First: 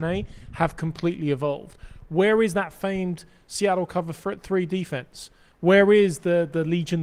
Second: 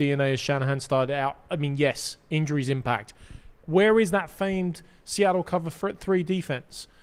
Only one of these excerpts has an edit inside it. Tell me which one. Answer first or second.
second